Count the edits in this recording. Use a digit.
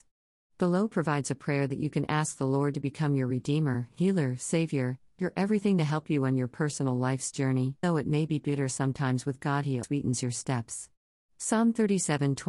3